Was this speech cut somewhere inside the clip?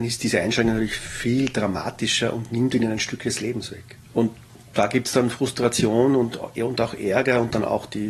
yes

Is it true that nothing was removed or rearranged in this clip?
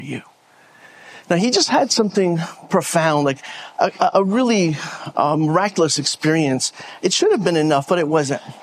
yes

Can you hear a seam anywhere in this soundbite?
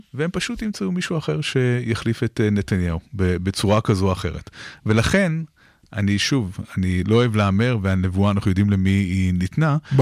no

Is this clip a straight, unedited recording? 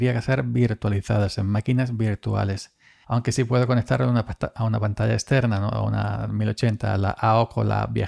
no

